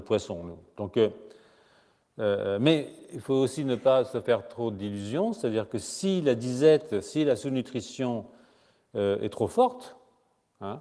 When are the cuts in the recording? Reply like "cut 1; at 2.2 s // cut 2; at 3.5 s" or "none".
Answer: none